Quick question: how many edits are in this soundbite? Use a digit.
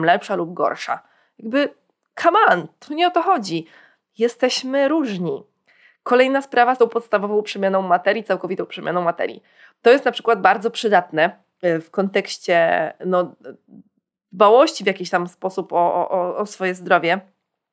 0